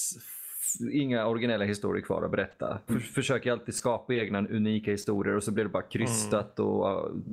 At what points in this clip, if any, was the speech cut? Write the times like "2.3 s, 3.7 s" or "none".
2.9 s

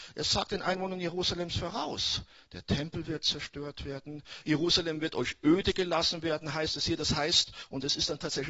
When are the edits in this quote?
4.4 s

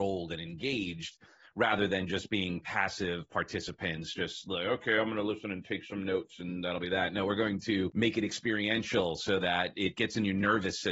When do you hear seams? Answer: none

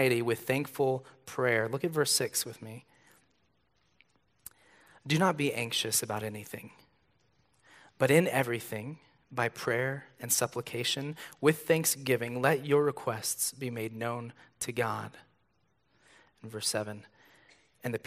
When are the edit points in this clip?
none

